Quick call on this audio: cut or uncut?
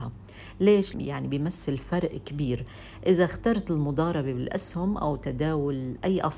cut